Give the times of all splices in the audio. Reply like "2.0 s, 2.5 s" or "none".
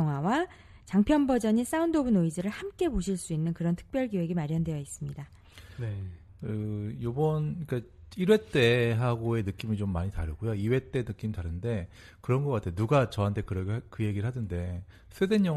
none

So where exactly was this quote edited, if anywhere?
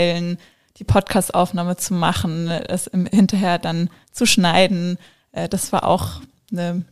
none

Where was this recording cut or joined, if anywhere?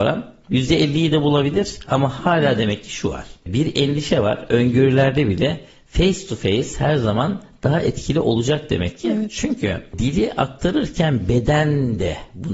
none

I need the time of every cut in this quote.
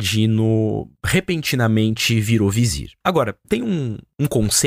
3.4 s

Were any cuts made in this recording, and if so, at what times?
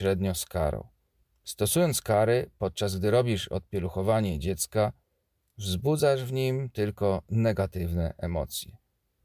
none

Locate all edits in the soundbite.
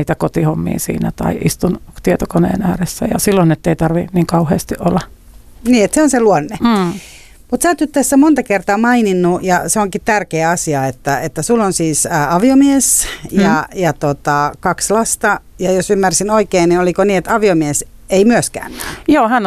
none

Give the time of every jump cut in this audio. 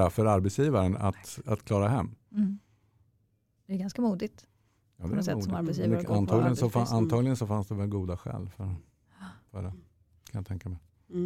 none

